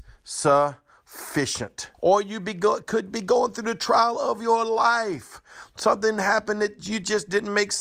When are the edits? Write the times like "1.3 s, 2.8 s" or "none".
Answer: 1.9 s